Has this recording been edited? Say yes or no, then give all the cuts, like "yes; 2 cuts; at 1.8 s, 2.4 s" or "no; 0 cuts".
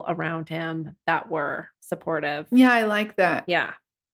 yes; 1 cut; at 1.7 s